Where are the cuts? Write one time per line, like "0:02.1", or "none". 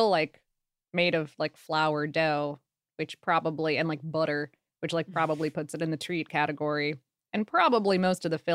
none